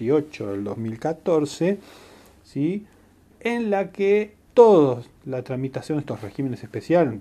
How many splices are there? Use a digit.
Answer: 1